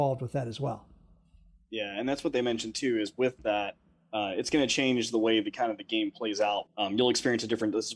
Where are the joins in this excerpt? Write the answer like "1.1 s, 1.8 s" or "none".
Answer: 6.7 s